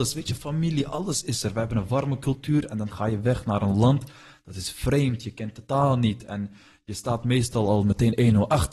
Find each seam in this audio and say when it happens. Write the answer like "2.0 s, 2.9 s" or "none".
none